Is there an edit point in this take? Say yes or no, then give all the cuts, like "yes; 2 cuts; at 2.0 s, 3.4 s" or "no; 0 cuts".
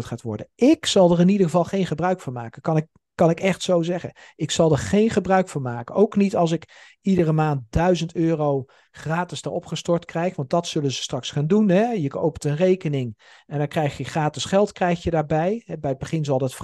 no; 0 cuts